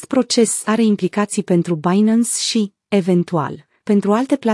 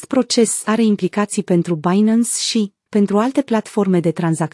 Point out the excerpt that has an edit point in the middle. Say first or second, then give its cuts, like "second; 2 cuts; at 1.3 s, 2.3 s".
second; 1 cut; at 2.9 s